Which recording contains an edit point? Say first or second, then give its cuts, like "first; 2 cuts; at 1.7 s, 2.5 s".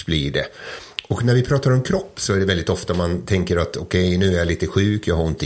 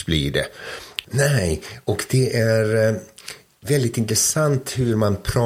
second; 1 cut; at 1.0 s